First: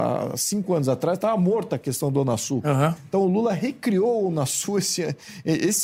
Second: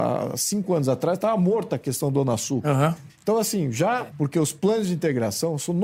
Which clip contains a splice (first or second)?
second